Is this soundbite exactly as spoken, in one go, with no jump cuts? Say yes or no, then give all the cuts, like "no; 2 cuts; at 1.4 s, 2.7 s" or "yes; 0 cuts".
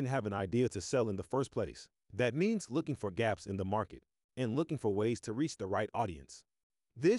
no; 2 cuts; at 2.0 s, 4.3 s